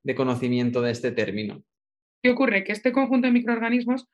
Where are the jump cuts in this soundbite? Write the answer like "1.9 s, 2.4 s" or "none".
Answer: 2.0 s